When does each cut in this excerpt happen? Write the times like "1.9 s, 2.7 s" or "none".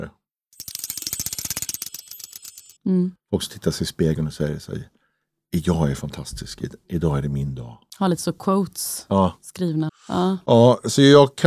2.8 s, 9.9 s